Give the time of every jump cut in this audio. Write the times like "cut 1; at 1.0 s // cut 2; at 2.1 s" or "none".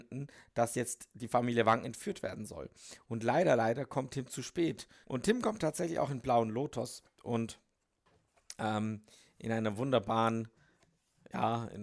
cut 1; at 5.0 s